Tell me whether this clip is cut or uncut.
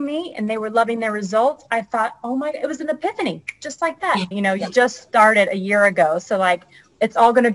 cut